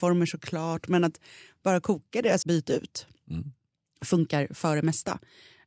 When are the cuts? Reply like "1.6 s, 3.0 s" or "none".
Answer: 2.4 s